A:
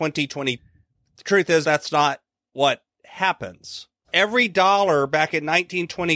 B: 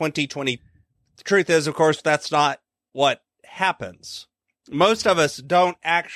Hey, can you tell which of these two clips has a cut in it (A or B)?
A